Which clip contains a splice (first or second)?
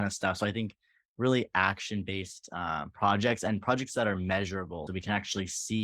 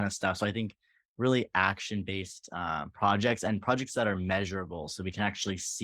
first